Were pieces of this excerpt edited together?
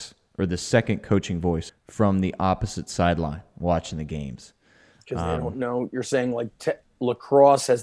yes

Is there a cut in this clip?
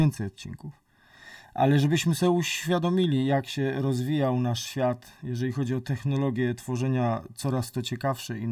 no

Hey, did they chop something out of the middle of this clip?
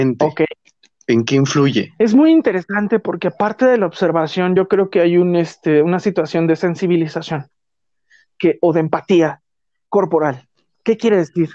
no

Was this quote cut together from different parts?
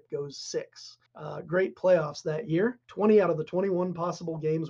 yes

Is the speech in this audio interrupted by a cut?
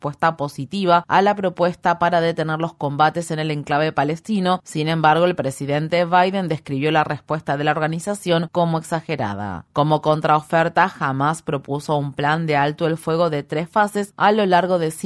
no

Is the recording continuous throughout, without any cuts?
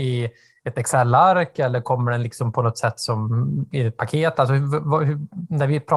yes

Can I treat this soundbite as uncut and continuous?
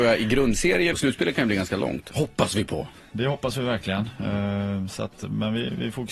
no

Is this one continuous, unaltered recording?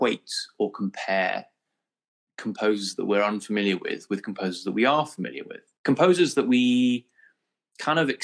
no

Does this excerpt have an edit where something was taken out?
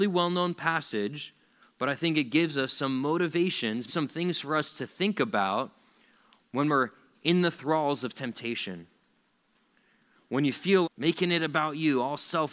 yes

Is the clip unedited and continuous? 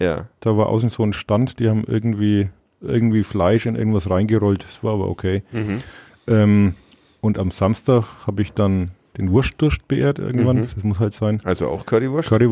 yes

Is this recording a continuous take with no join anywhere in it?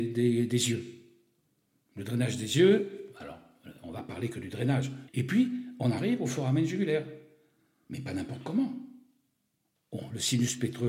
no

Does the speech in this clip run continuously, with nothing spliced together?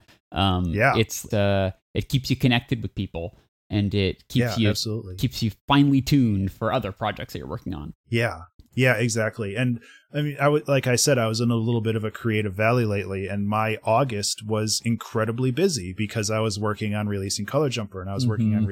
no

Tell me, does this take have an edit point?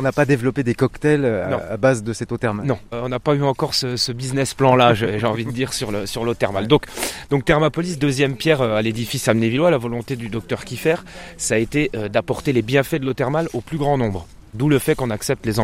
no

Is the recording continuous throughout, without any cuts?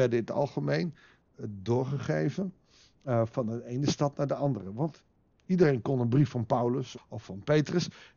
no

